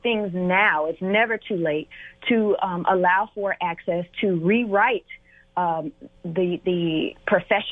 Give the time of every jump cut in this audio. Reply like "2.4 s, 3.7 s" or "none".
none